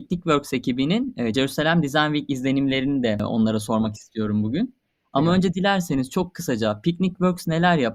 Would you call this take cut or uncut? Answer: uncut